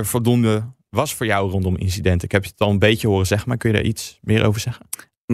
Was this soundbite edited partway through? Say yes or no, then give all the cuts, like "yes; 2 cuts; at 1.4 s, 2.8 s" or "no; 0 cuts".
no; 0 cuts